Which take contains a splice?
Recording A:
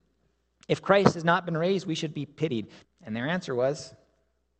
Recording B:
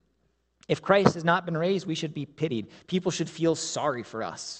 A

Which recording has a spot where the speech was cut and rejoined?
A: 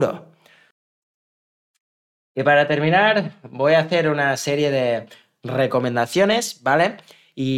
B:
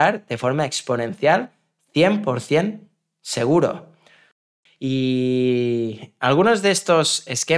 B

